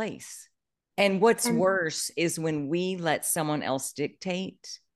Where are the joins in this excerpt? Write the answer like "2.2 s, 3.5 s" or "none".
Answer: 0.9 s